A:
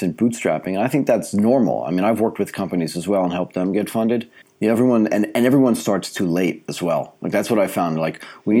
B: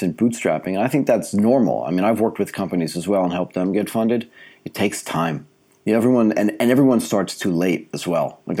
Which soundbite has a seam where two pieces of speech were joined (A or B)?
A